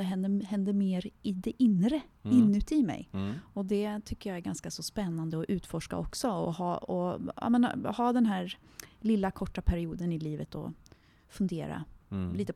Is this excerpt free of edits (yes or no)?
yes